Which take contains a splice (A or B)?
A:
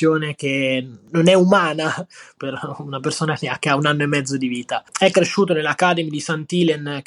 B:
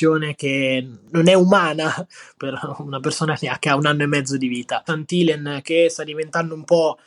B